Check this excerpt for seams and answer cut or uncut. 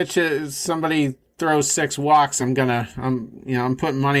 uncut